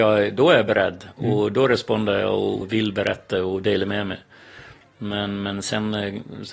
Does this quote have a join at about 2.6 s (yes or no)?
yes